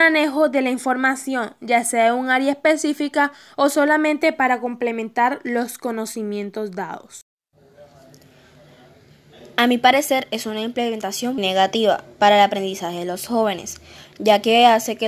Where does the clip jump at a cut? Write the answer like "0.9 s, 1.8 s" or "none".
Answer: 11.4 s